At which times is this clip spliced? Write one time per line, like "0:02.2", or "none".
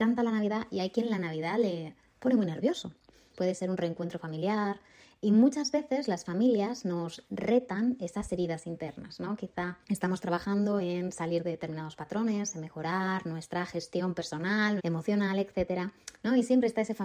0:03.3
0:09.8
0:14.8